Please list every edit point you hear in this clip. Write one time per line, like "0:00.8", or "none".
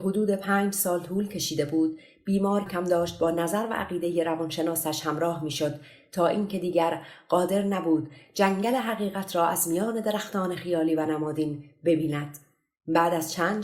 0:02.7